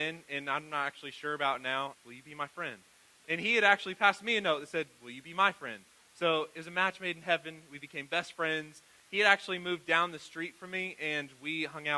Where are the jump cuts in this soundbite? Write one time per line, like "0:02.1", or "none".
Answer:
0:01.9